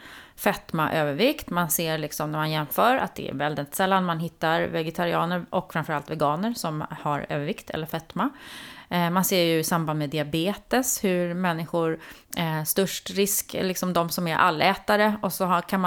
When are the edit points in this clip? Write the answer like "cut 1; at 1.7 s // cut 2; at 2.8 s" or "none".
none